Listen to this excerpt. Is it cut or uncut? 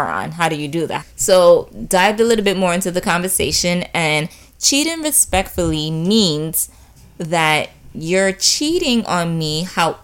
cut